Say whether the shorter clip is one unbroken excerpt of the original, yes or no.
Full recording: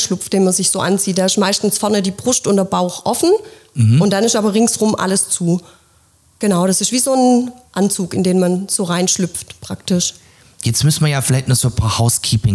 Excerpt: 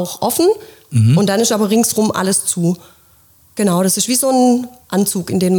yes